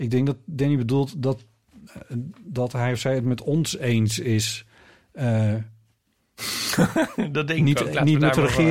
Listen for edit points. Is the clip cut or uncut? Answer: uncut